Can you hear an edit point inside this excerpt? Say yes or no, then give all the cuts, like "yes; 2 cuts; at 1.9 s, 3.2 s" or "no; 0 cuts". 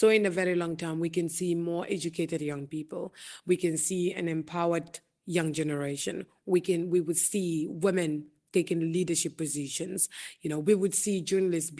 no; 0 cuts